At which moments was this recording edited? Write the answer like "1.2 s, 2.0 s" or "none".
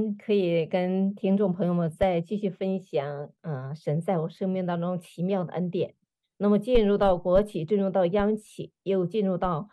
6.2 s